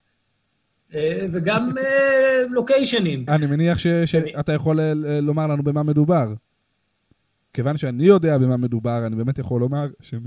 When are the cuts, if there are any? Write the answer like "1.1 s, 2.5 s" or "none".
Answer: 3.3 s, 7.5 s